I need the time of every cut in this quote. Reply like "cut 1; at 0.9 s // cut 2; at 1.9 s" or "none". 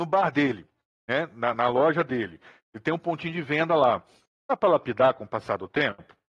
cut 1; at 4.4 s